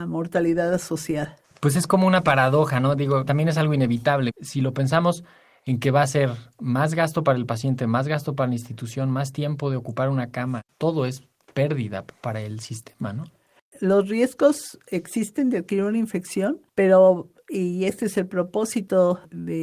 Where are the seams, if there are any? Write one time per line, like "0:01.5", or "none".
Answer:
0:03.3
0:04.3